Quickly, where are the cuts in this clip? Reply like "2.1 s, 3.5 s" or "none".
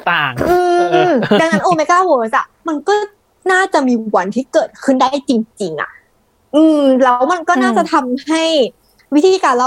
none